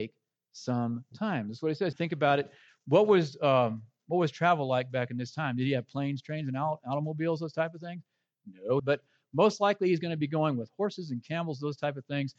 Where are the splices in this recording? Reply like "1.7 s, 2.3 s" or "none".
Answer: 1.9 s, 8.8 s